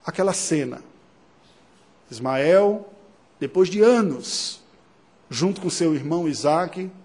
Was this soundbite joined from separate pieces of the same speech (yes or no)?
no